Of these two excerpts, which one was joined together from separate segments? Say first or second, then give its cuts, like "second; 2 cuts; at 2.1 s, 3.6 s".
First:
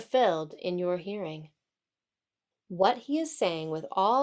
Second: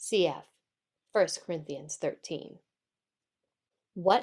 first; 1 cut; at 2.5 s